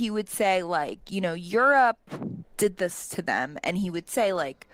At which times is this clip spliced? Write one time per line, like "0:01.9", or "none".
none